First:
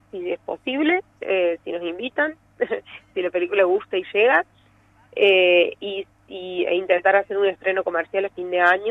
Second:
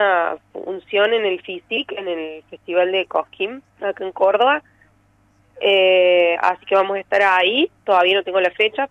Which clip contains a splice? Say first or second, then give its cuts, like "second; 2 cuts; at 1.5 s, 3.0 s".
second; 1 cut; at 3.7 s